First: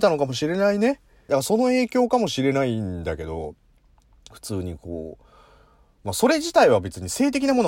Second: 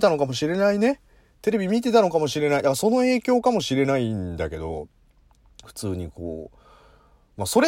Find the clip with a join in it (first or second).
first